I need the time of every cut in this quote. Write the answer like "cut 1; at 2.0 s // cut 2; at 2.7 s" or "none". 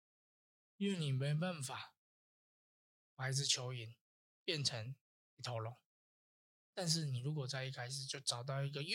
none